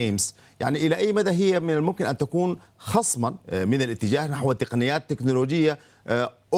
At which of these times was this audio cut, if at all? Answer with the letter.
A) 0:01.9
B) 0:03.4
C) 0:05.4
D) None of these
B